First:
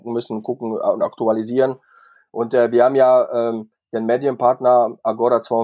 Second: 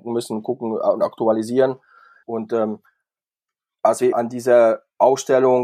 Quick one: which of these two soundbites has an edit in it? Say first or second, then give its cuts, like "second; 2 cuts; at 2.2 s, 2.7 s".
second; 2 cuts; at 2.2 s, 4.1 s